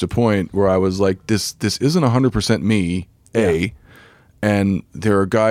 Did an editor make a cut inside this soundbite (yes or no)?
no